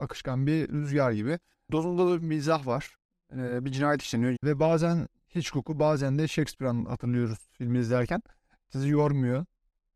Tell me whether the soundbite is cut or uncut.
cut